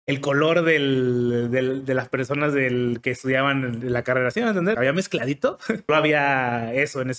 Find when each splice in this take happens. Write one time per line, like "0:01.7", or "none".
0:04.7
0:05.9